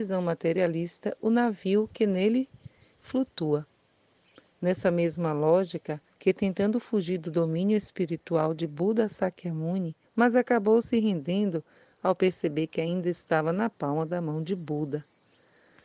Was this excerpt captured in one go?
no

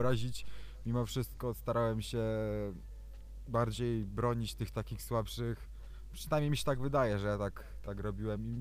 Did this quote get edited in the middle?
no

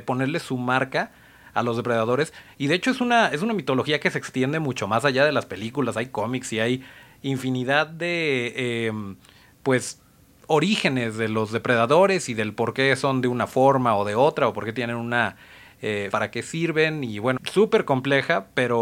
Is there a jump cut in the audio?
yes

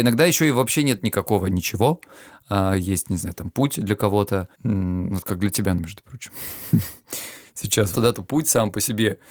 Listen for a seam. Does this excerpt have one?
yes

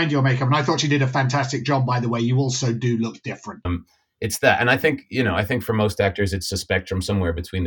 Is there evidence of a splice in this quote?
yes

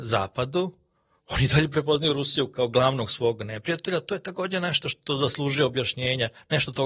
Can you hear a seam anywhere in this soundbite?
no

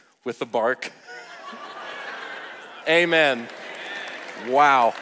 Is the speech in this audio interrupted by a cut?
yes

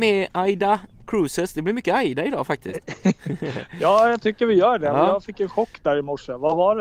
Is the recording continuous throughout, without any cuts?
yes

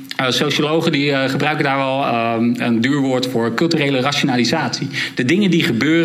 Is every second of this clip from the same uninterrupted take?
yes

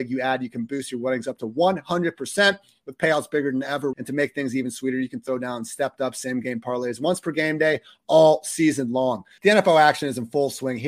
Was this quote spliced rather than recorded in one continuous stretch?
yes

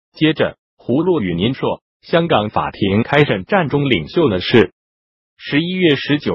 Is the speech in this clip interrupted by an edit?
yes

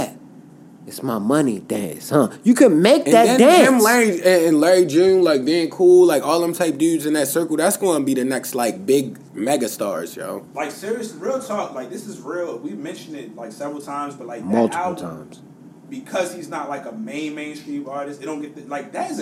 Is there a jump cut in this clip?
no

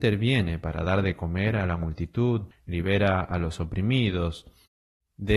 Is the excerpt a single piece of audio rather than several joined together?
no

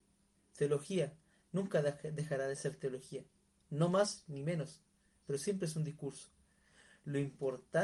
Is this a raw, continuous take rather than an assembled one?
yes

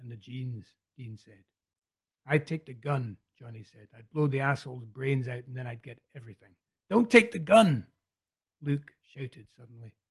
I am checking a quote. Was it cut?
no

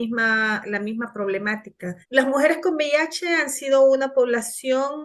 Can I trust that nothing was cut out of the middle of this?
no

